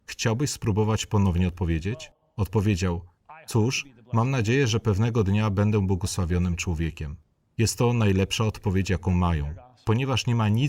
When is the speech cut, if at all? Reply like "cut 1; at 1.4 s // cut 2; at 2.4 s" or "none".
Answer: none

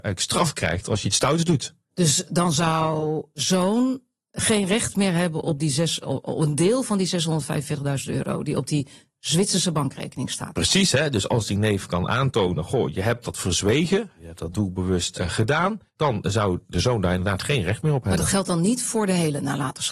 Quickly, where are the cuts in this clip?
cut 1; at 15.9 s

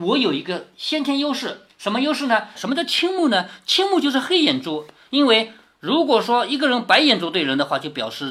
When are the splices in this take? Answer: cut 1; at 2.6 s

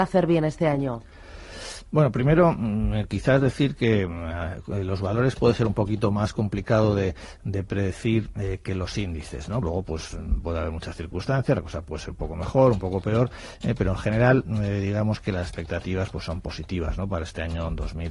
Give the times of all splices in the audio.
cut 1; at 9.6 s

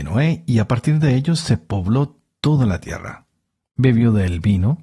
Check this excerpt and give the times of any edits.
cut 1; at 3.7 s

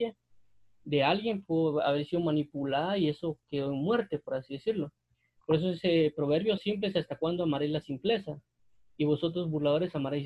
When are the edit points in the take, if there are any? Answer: cut 1; at 6.6 s

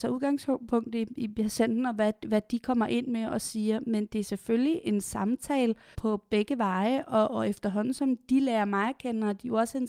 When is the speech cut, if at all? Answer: cut 1; at 5.9 s

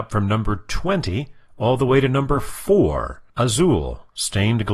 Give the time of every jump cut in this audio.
cut 1; at 3.3 s

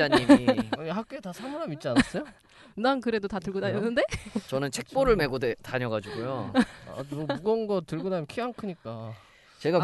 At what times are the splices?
none

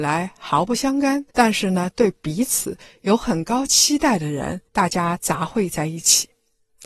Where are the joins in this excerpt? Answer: cut 1; at 1.3 s // cut 2; at 4.7 s

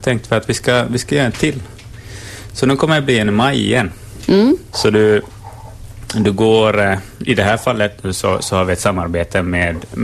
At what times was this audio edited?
cut 1; at 4.7 s

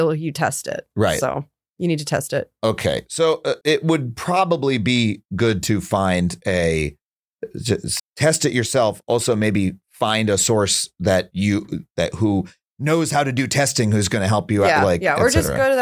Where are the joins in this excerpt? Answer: cut 1; at 3.6 s // cut 2; at 8.0 s

